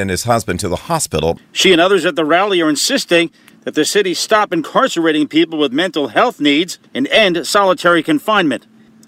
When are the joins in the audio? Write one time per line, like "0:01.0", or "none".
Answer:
0:01.4
0:06.9